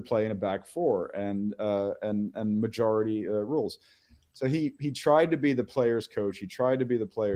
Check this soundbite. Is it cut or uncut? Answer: uncut